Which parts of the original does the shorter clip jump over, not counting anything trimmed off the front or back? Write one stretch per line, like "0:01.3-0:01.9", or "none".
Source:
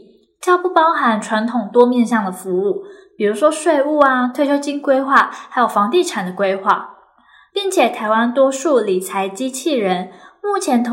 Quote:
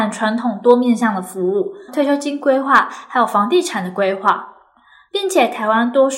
0:03.0-0:04.3